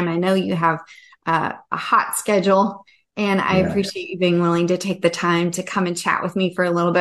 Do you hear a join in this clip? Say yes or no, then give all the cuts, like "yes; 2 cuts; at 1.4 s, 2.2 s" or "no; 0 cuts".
no; 0 cuts